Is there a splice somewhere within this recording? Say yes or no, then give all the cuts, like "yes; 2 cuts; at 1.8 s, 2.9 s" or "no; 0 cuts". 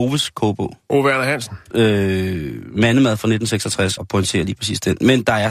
yes; 2 cuts; at 1.7 s, 4.0 s